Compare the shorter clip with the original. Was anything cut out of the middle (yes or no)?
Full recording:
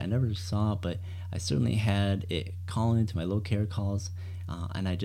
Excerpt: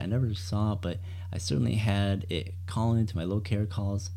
no